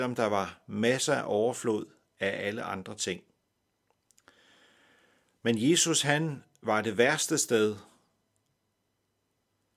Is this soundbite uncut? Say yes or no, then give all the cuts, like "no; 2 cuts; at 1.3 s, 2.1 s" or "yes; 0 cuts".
yes; 0 cuts